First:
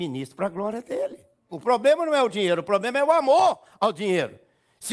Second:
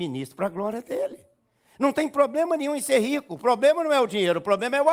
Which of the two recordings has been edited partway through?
first; 1 cut; at 1.5 s

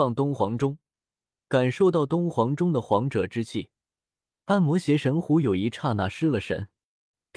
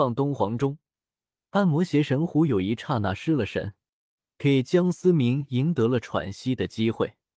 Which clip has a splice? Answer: second; 1 cut; at 1.4 s

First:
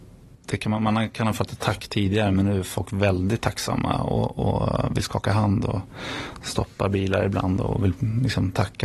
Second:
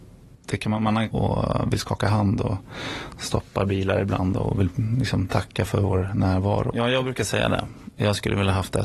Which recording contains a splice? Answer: second; 2 cuts; at 1.1 s, 6.7 s

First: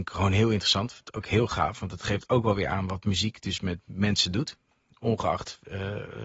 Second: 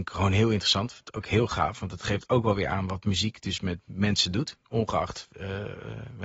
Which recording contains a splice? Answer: second; 1 cut; at 4.6 s

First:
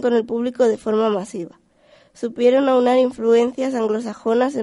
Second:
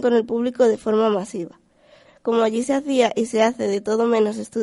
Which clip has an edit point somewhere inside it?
second; 1 cut; at 2.1 s

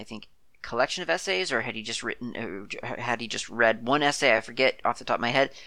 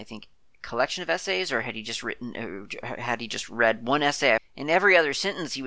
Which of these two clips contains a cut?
second; 1 cut; at 4.4 s

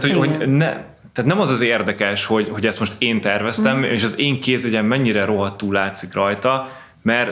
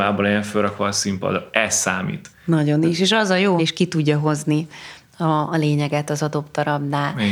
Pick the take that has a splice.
second; 2 cuts; at 2.3 s, 3.6 s

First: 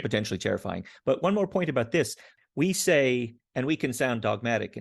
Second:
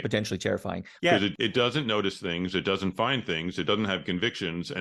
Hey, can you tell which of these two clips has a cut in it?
second; 1 cut; at 1.0 s

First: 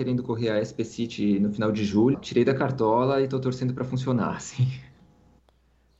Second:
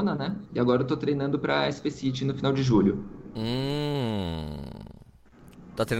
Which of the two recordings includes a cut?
first; 1 cut; at 2.1 s

